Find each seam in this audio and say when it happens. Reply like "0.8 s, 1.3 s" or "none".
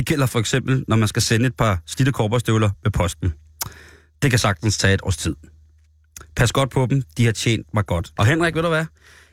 8.2 s

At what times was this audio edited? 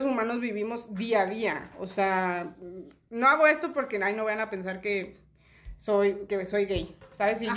6.3 s

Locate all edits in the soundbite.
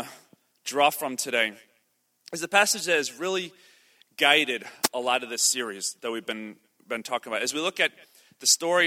none

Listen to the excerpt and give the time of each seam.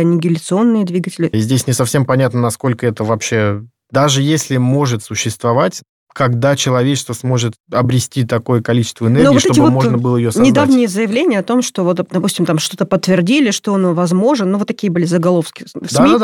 1.3 s

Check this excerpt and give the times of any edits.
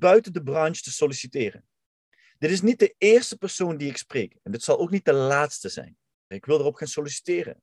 6.3 s

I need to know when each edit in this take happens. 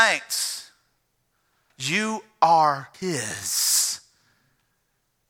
1.7 s, 2.9 s

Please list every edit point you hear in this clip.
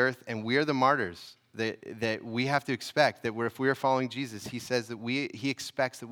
none

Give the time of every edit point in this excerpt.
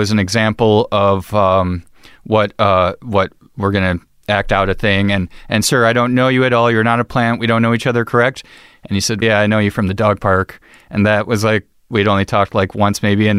9.2 s

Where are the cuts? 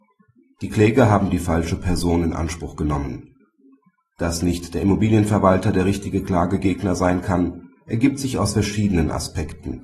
none

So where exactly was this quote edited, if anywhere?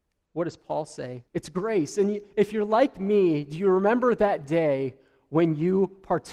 1.2 s

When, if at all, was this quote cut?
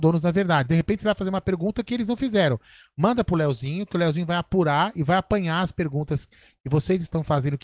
none

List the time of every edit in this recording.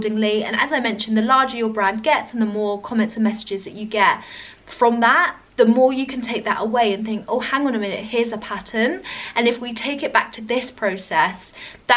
none

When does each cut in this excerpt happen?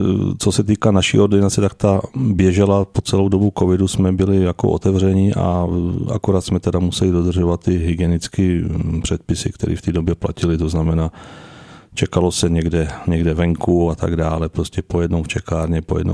none

